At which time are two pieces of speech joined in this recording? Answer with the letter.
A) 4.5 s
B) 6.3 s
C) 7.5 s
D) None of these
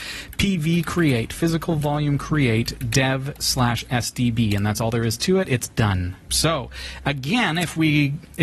B